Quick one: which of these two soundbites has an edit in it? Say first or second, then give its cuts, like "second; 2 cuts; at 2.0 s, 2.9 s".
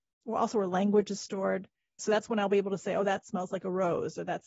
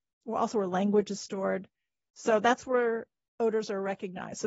first; 1 cut; at 2.0 s